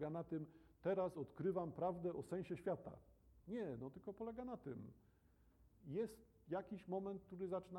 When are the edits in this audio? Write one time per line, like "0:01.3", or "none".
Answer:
none